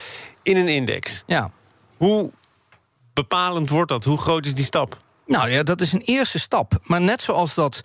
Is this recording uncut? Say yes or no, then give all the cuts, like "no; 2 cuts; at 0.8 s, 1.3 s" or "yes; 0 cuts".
yes; 0 cuts